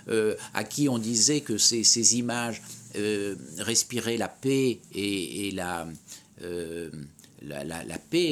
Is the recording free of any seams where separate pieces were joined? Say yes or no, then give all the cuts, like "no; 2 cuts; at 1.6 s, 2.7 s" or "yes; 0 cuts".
yes; 0 cuts